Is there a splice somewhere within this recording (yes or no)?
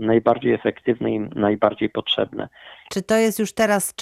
yes